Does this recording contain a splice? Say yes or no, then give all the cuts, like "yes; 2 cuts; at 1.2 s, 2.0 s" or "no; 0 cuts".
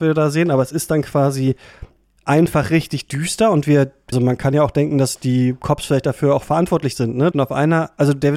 yes; 2 cuts; at 4.1 s, 7.3 s